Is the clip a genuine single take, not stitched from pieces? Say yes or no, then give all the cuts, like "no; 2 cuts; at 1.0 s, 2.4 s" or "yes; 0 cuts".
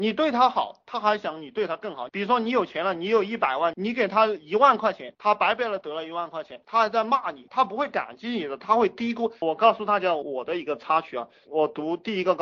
no; 2 cuts; at 9.4 s, 11.4 s